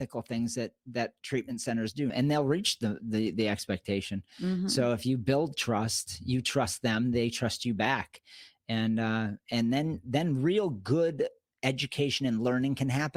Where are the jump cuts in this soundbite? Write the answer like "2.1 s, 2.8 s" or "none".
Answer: 2.1 s